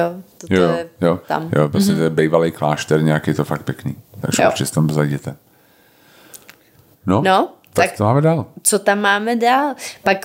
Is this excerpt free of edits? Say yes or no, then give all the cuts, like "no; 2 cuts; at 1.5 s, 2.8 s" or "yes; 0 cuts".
no; 1 cut; at 1.3 s